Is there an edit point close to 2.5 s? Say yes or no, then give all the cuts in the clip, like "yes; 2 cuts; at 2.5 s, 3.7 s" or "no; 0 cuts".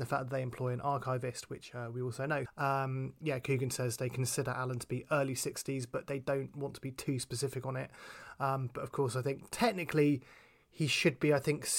yes; 1 cut; at 2.5 s